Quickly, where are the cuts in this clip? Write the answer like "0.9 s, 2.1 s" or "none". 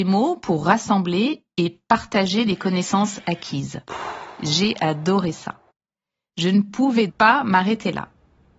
7.1 s